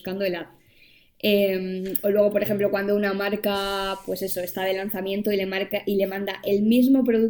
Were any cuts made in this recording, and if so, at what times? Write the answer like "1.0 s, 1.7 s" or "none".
none

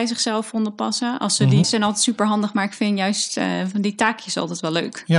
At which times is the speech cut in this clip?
1.6 s

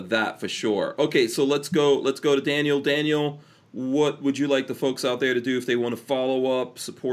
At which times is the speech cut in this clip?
none

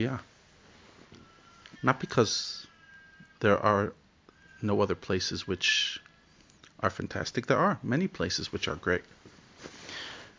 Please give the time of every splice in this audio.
1.8 s

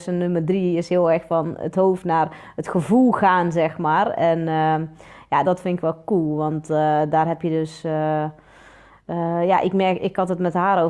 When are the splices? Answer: 5.4 s

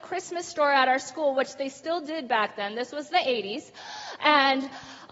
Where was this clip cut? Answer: none

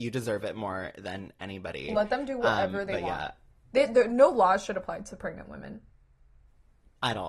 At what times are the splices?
none

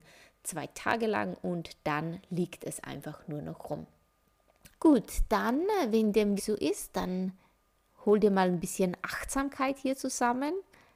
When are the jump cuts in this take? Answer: 4.7 s, 6.4 s

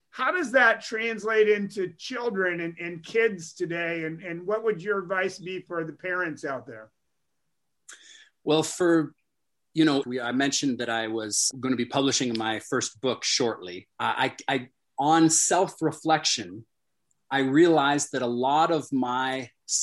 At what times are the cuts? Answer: 10.0 s, 11.5 s, 13.9 s

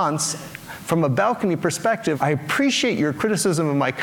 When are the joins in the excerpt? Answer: 2.1 s

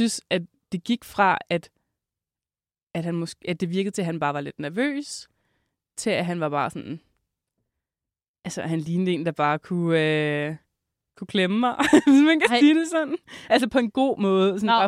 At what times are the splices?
none

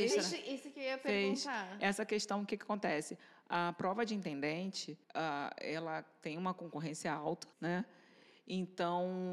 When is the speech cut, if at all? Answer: 5.0 s, 7.5 s

